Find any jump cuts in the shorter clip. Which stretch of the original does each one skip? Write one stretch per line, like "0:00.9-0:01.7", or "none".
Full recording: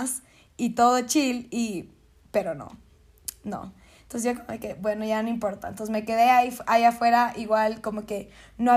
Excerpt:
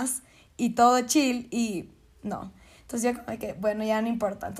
0:02.2-0:03.4

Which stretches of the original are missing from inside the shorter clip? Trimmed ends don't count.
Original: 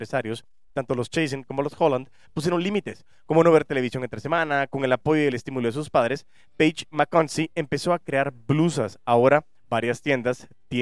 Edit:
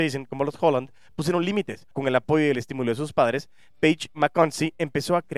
0:03.1-0:04.7

